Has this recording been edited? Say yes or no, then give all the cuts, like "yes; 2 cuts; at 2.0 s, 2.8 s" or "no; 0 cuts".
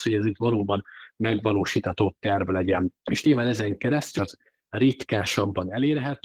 yes; 2 cuts; at 3.0 s, 4.2 s